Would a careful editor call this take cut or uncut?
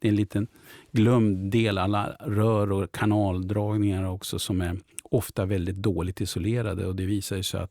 uncut